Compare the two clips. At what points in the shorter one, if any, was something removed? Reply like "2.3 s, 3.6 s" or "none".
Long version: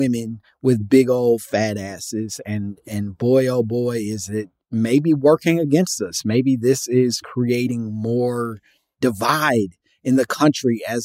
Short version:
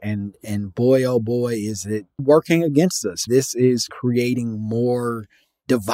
2.2 s, 3.3 s